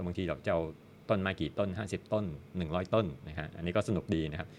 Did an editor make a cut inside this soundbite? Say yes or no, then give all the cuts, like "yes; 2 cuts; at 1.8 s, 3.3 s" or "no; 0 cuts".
no; 0 cuts